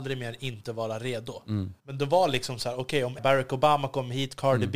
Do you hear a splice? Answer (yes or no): yes